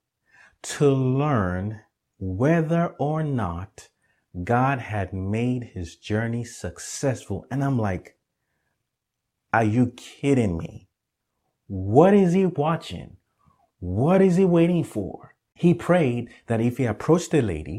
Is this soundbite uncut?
yes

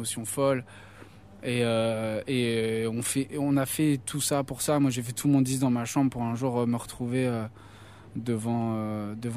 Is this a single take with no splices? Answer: yes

